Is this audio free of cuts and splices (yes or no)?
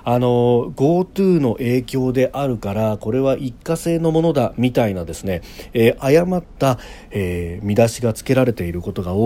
yes